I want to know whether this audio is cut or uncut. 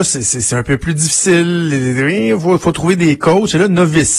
uncut